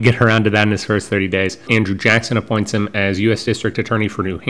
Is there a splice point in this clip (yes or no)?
yes